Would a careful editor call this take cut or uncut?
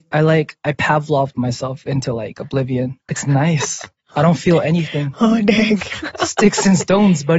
cut